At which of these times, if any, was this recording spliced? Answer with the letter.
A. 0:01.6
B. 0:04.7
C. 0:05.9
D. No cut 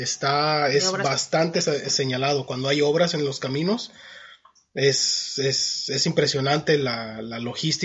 D